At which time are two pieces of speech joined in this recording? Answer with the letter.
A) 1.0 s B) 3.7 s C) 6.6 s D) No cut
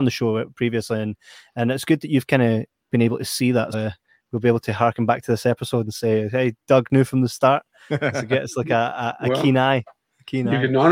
B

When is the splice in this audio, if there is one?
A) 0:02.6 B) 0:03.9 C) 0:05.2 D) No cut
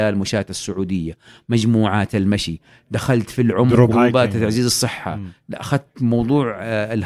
B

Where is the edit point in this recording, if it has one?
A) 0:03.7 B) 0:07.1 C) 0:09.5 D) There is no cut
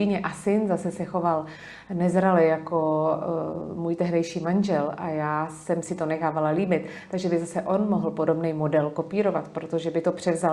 D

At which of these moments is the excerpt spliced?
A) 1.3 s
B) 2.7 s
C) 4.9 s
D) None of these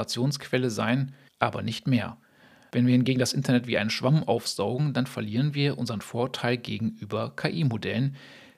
A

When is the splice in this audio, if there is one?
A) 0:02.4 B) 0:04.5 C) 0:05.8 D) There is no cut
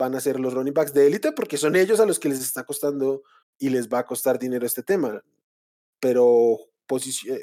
D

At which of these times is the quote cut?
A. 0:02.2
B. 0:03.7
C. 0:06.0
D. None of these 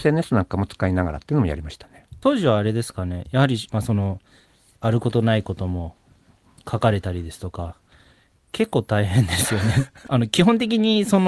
B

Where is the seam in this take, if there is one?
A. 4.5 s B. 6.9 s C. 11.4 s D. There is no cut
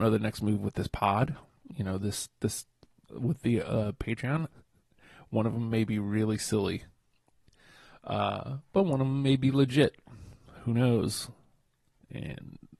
A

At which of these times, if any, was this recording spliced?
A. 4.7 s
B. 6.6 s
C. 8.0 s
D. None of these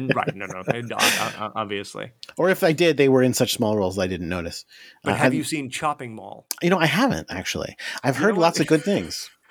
D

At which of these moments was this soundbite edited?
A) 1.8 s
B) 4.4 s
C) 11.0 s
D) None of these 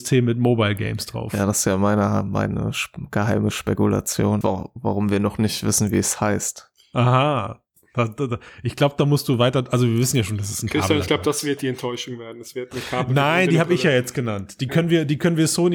B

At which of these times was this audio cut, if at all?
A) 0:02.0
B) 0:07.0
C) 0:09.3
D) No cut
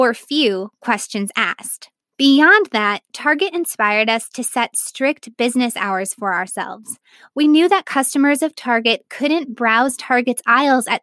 A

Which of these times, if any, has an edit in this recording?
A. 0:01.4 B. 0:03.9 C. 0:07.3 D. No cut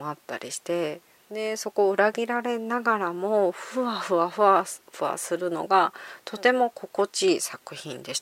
D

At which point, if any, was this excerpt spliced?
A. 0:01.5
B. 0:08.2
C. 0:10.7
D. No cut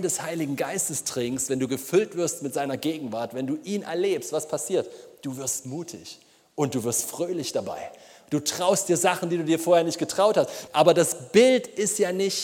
C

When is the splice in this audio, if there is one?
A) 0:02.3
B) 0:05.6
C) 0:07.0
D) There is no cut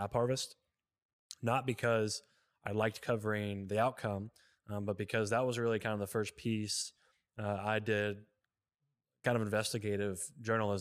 D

